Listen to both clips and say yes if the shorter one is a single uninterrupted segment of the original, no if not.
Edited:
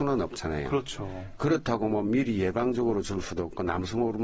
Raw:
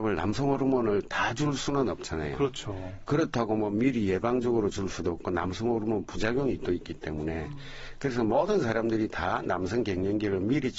yes